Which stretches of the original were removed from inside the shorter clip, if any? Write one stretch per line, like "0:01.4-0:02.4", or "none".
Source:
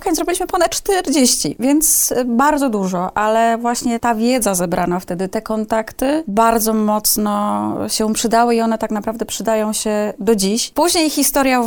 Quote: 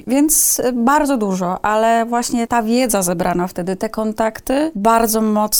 none